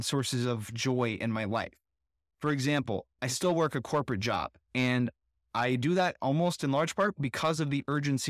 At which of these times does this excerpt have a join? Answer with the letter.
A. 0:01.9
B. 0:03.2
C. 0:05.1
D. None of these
B